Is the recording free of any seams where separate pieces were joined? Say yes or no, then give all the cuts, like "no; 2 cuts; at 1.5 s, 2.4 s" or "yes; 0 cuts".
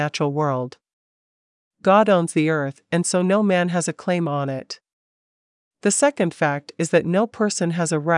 yes; 0 cuts